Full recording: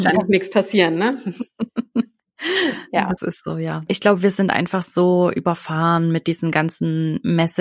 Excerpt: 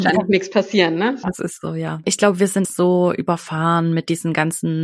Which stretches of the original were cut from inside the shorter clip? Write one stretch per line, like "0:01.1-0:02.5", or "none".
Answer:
0:01.2-0:03.1
0:04.5-0:04.8

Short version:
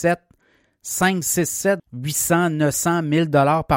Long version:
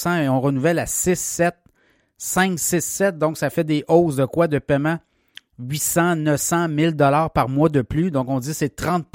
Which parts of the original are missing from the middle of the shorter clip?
0:03.1-0:05.5

